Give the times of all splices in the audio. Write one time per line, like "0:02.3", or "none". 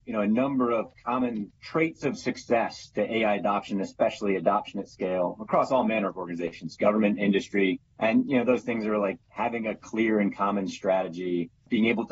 none